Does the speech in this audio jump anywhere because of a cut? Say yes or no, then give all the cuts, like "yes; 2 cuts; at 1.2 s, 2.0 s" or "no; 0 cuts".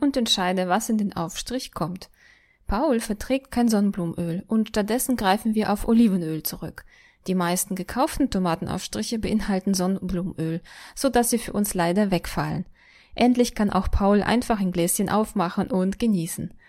no; 0 cuts